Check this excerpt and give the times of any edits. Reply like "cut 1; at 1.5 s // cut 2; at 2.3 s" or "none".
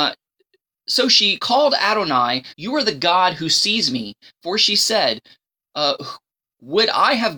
cut 1; at 2.5 s